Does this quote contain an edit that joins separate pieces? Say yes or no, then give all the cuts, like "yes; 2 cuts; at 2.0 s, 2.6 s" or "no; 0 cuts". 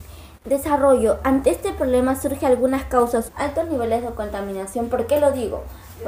yes; 1 cut; at 3.3 s